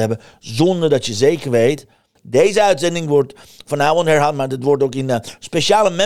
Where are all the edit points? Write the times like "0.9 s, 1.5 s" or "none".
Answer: 2.2 s

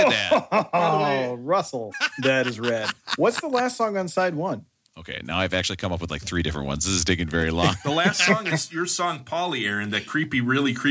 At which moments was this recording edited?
1.9 s, 4.8 s

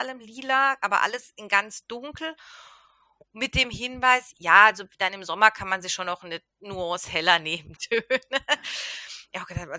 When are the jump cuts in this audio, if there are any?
7.7 s

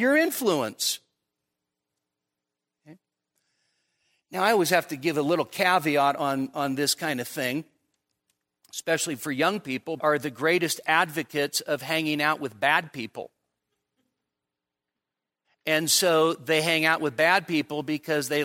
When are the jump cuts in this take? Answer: 10.0 s, 15.4 s

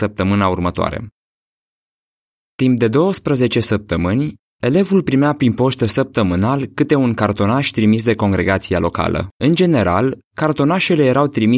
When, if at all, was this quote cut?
9.3 s

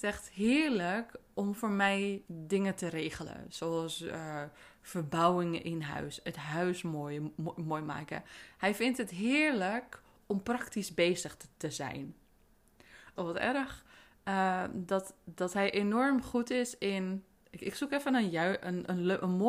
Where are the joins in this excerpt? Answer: 13.2 s

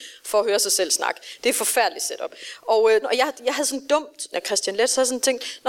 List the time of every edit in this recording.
3.0 s, 4.3 s

